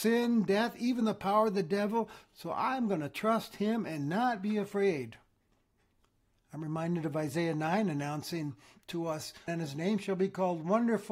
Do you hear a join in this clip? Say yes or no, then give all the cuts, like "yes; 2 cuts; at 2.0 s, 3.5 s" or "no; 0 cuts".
yes; 1 cut; at 9.5 s